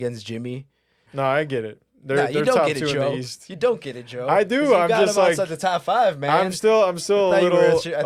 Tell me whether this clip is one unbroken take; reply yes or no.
no